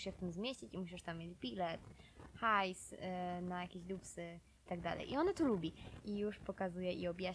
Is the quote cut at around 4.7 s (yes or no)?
yes